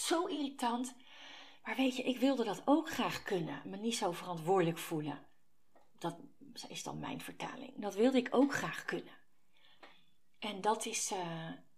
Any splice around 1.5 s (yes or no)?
no